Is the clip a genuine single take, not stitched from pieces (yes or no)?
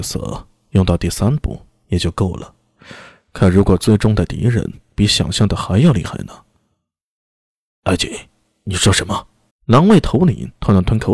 no